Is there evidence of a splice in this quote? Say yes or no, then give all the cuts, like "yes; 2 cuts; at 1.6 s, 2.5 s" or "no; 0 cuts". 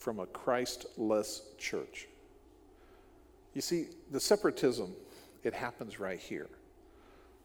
yes; 1 cut; at 5.4 s